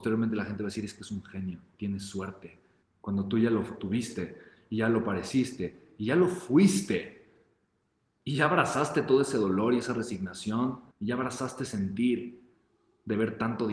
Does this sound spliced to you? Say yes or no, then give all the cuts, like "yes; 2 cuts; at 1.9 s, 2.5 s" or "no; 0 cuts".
yes; 2 cuts; at 2.8 s, 10.9 s